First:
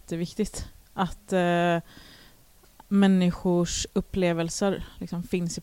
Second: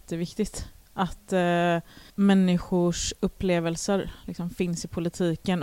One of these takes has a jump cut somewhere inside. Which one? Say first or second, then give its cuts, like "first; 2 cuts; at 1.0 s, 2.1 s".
second; 1 cut; at 2.1 s